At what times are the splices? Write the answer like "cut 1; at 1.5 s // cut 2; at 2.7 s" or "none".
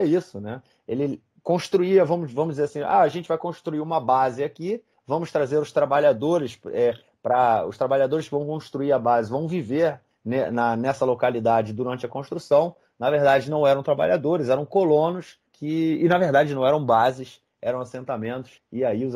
none